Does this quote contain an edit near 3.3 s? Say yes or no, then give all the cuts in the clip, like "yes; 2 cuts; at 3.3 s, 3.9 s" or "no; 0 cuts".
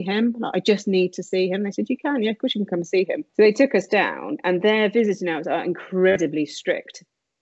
yes; 1 cut; at 3.3 s